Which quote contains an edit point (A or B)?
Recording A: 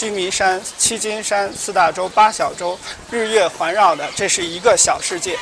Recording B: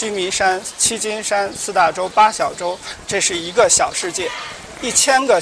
B